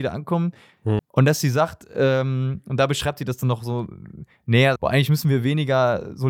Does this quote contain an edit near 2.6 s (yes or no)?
no